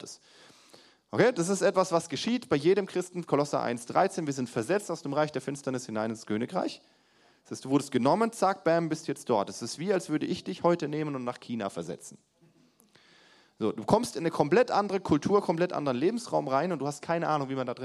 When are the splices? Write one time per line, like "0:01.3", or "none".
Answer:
none

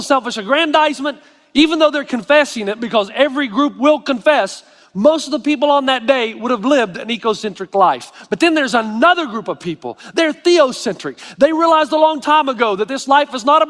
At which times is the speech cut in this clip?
none

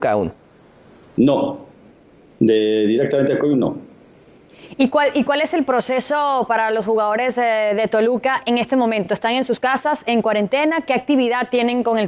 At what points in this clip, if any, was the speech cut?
none

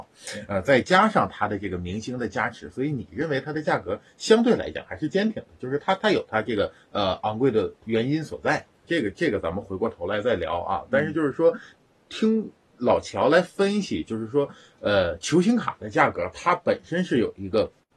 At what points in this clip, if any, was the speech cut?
0:08.8

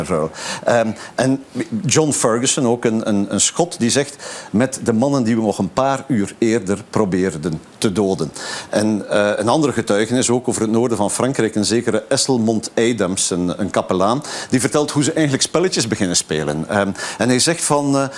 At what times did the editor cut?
0:04.5

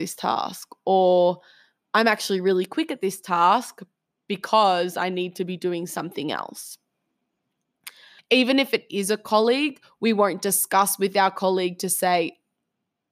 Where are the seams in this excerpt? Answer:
0:08.2

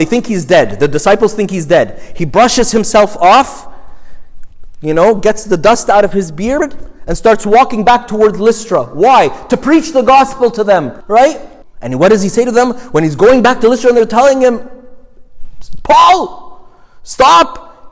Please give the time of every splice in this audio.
none

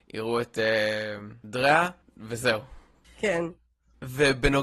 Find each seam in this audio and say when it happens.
none

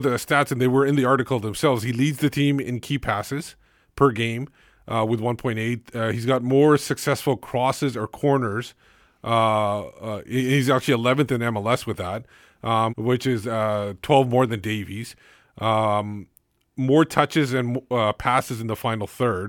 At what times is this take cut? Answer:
0:12.9

